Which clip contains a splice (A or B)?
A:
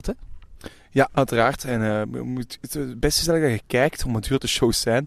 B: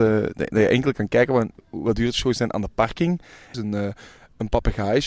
B